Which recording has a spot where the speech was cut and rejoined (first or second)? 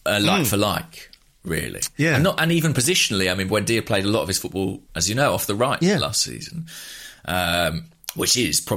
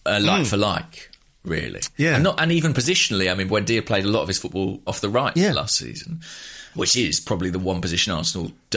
second